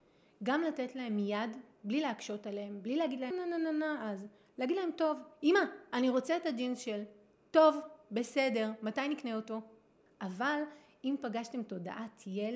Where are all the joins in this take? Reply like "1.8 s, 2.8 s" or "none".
3.3 s, 10.1 s